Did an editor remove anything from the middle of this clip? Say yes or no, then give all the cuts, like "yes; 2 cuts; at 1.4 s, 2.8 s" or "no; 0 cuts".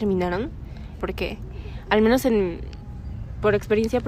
yes; 1 cut; at 1.0 s